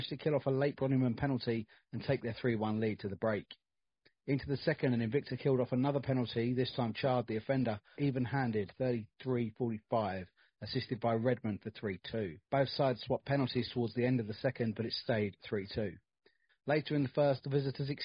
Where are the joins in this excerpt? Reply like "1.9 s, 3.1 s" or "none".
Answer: 7.9 s, 12.4 s, 16.5 s